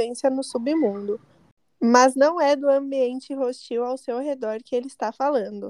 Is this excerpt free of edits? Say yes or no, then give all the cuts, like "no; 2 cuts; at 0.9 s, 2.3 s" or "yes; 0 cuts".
yes; 0 cuts